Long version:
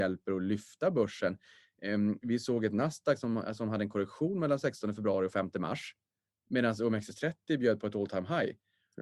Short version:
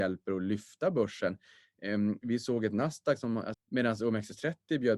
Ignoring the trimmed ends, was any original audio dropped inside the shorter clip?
yes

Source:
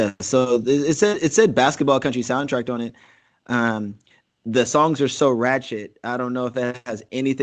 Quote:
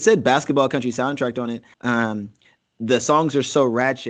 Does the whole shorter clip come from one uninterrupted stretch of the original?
no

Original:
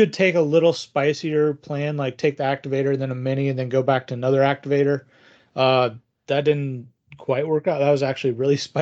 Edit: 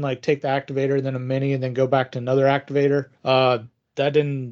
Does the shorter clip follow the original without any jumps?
no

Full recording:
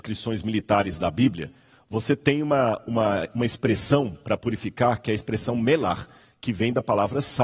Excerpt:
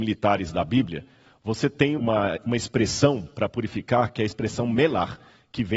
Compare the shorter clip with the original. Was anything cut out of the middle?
yes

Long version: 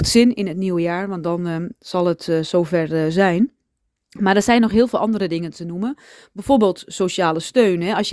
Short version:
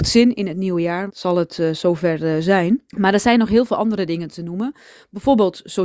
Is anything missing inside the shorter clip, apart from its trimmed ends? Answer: yes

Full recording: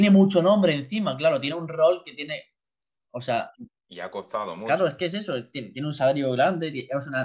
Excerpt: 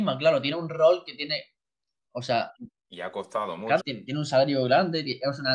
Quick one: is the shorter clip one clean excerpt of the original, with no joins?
no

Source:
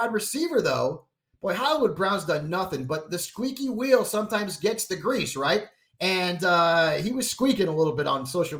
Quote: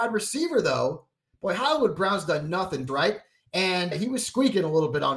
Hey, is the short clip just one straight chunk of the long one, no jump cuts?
no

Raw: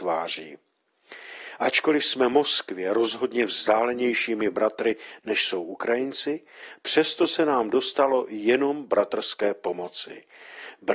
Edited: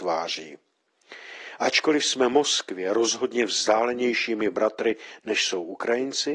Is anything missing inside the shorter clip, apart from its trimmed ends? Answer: no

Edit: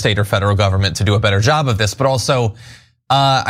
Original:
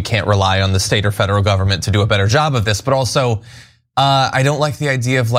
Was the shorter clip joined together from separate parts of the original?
no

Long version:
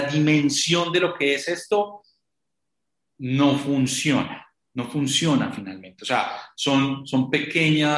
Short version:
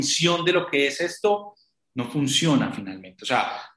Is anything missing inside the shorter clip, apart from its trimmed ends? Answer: yes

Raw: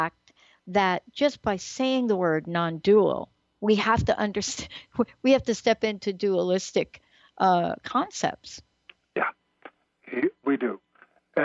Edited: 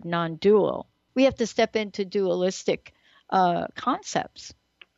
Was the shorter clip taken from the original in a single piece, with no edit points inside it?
no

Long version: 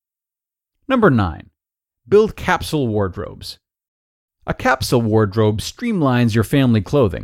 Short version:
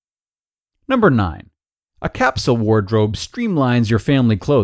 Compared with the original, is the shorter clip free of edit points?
no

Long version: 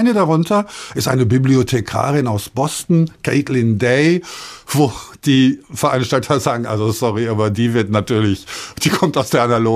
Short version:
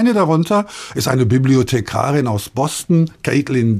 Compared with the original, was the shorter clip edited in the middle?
no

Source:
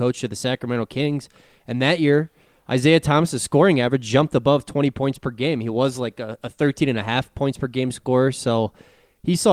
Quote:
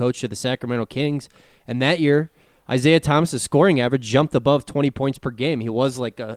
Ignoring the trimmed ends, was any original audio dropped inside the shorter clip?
no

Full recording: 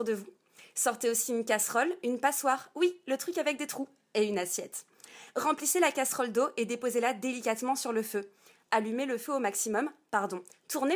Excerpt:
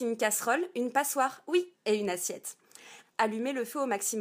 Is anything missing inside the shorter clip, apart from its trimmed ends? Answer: yes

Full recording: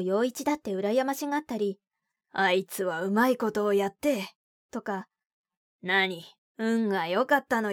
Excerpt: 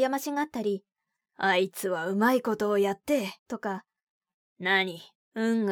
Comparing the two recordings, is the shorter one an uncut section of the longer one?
no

